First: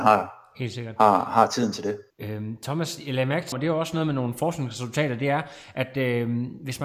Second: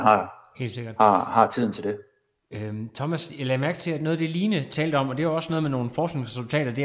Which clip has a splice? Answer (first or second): first